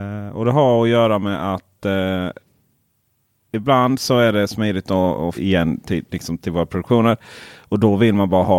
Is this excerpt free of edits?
no; 1 cut; at 5.3 s

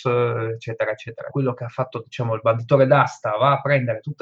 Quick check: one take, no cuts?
no; 1 cut; at 1.3 s

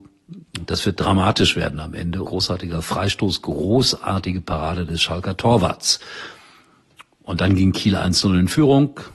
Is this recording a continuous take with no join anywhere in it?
no; 1 cut; at 2.3 s

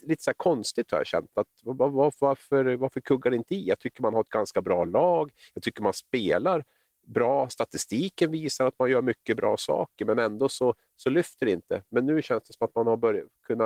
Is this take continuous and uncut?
yes; 0 cuts

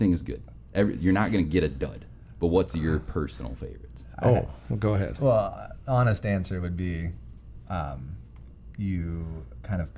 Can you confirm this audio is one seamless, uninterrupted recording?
yes; 0 cuts

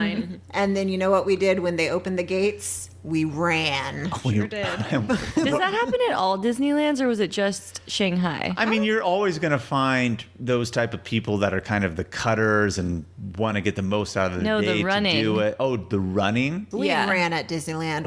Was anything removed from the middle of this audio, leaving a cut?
no; 0 cuts

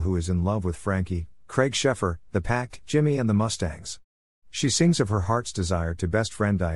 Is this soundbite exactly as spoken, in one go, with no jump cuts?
no; 1 cut; at 2.3 s

